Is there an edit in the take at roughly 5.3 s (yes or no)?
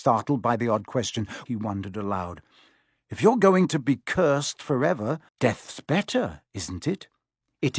yes